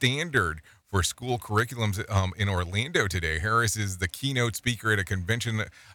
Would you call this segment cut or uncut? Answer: uncut